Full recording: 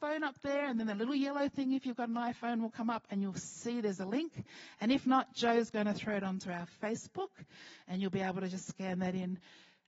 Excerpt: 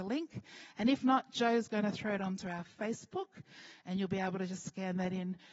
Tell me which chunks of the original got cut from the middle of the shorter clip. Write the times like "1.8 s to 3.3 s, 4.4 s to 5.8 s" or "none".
none